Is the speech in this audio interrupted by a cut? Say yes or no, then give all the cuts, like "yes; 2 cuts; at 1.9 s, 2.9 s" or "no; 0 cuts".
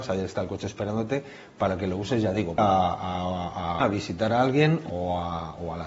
yes; 2 cuts; at 2.6 s, 3.8 s